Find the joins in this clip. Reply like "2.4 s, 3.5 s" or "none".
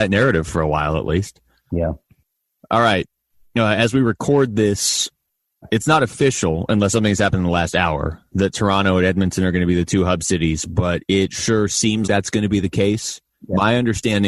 12.1 s